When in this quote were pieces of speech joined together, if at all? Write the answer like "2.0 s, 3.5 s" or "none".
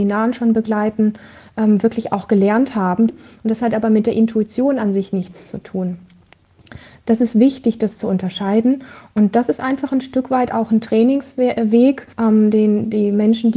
3.1 s, 12.1 s